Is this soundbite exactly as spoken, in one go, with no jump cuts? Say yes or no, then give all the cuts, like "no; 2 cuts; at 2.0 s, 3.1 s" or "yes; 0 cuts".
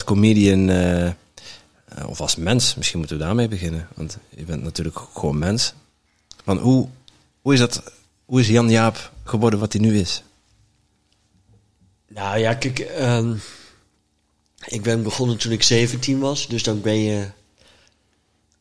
yes; 0 cuts